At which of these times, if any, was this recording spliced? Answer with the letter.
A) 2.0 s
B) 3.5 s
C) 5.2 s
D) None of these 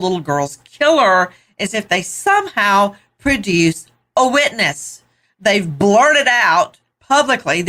D